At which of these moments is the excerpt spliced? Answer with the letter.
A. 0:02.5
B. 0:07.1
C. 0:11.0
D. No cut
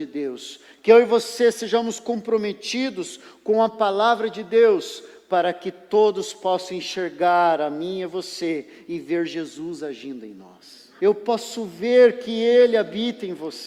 C